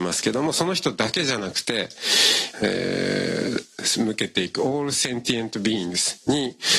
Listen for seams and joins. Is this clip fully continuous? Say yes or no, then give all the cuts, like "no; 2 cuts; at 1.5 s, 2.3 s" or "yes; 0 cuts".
no; 1 cut; at 2.5 s